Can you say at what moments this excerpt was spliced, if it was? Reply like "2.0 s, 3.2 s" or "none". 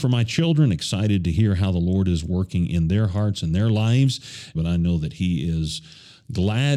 4.5 s